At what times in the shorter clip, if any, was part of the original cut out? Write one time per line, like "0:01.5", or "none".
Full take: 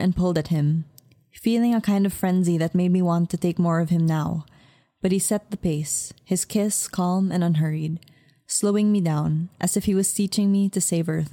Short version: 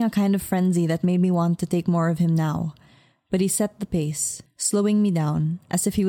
0:04.5